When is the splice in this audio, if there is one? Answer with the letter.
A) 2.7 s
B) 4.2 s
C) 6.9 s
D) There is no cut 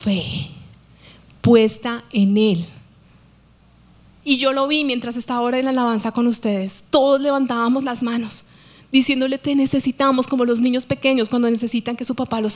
B